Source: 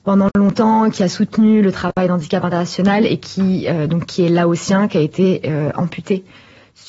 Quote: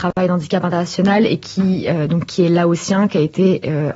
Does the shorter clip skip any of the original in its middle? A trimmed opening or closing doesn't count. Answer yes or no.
no